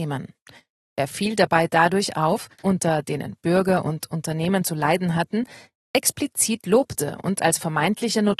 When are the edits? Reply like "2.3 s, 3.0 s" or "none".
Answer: 2.6 s